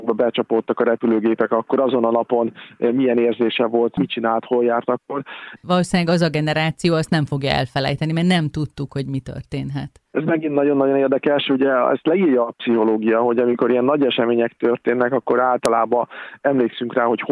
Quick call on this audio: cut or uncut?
cut